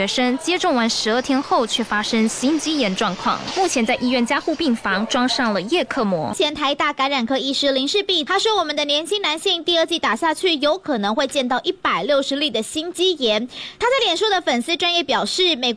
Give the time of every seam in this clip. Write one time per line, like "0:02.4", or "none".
none